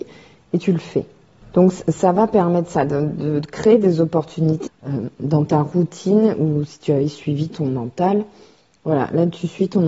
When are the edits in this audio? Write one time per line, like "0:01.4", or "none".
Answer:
0:04.7